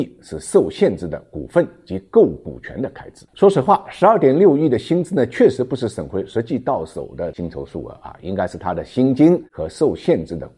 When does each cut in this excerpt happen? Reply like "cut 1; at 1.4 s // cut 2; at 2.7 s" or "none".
cut 1; at 3.3 s